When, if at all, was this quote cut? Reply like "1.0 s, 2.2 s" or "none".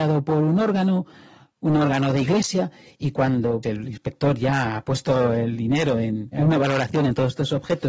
3.6 s, 6.3 s